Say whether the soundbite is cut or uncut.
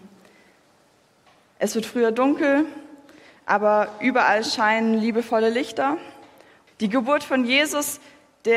cut